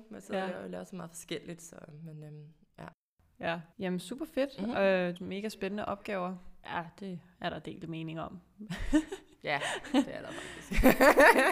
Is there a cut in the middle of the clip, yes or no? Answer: yes